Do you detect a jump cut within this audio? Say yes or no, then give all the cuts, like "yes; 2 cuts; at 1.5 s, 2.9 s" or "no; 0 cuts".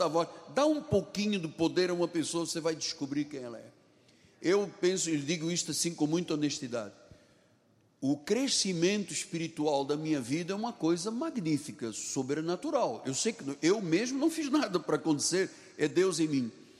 no; 0 cuts